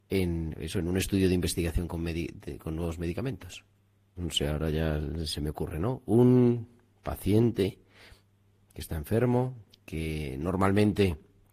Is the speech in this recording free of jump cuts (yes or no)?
no